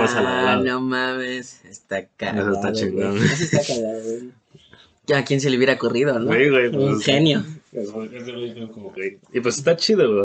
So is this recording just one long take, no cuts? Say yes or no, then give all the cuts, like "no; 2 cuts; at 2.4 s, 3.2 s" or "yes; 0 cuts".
no; 1 cut; at 9.0 s